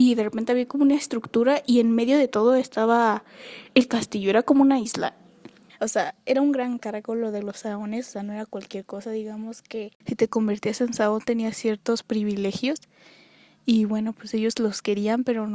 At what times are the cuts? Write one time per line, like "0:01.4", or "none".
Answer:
0:05.7